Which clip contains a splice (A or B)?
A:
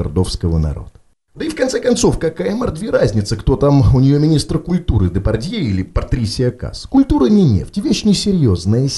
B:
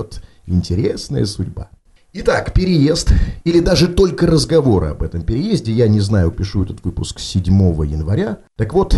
B